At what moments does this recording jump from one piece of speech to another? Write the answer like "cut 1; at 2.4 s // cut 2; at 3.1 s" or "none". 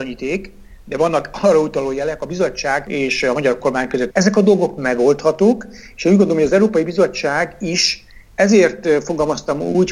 cut 1; at 4.1 s